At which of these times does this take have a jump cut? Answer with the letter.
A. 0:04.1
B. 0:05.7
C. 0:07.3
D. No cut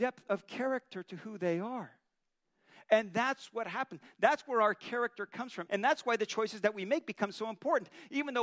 B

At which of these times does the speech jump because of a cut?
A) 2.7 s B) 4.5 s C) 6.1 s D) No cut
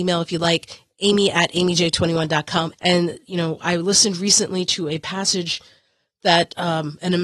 A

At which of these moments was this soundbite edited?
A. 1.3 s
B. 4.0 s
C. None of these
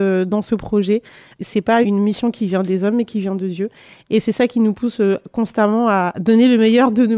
C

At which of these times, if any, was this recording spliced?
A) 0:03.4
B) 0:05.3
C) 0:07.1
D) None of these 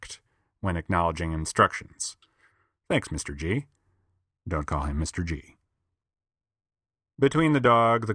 D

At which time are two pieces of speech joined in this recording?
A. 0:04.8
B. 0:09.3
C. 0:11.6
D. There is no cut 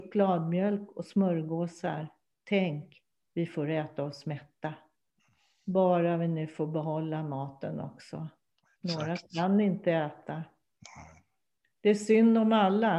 D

